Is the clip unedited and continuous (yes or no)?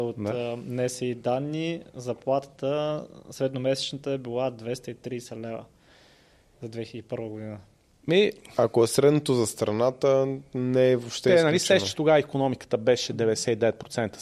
yes